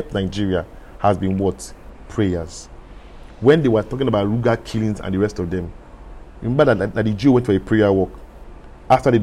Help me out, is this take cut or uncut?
uncut